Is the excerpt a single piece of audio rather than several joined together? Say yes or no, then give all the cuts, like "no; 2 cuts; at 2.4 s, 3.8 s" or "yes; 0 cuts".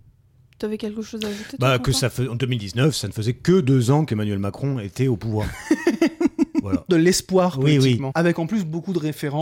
no; 2 cuts; at 6.9 s, 8.1 s